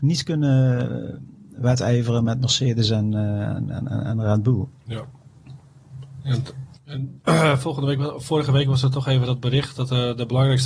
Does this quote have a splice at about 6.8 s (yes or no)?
yes